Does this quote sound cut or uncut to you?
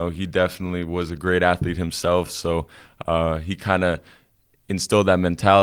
uncut